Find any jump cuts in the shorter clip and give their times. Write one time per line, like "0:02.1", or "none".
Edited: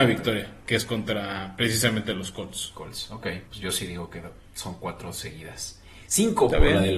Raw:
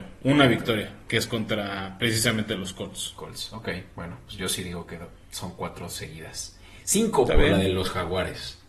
0:03.5